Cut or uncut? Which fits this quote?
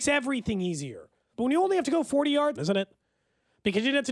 cut